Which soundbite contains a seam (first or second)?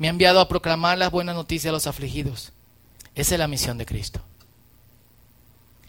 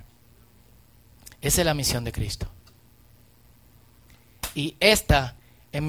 first